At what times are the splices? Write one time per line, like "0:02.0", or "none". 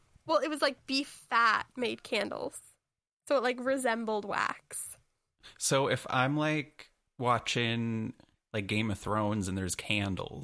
none